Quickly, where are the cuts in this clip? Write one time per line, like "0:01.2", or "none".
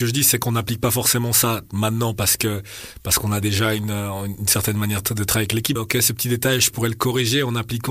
0:05.8